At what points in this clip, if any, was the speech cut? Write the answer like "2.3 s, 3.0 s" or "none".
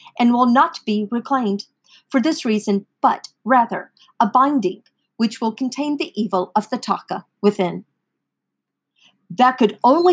3.0 s